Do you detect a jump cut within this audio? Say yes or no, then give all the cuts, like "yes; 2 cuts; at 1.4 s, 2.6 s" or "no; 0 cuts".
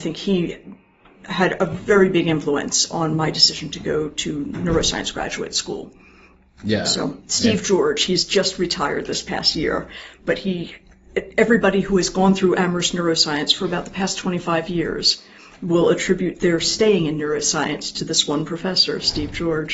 no; 0 cuts